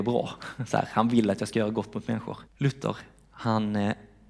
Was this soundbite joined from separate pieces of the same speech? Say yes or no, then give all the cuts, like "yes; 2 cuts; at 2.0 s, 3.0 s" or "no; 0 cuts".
yes; 1 cut; at 2.5 s